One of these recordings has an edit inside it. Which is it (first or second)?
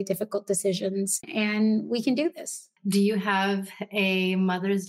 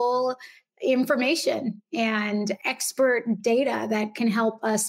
first